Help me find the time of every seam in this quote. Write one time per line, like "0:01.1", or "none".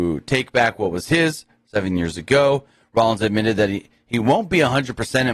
none